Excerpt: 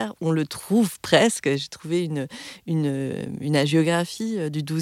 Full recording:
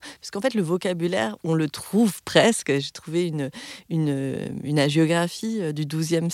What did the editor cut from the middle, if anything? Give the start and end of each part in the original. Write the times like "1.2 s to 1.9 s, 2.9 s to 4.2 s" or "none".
none

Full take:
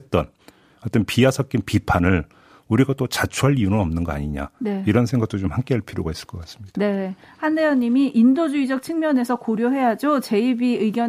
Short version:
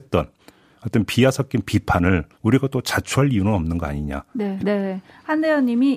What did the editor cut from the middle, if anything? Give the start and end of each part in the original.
2.3 s to 2.6 s, 4.8 s to 6.7 s

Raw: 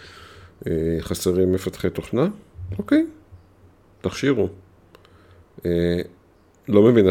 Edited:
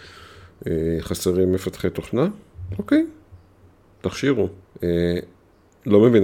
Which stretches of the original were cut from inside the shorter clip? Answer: 4.6 s to 5.5 s

